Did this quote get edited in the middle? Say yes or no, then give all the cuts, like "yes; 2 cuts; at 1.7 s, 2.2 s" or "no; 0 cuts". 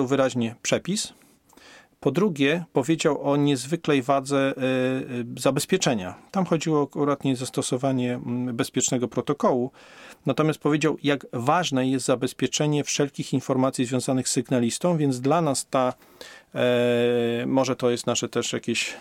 no; 0 cuts